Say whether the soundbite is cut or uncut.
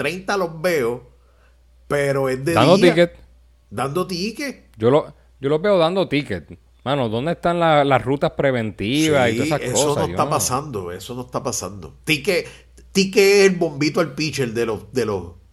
uncut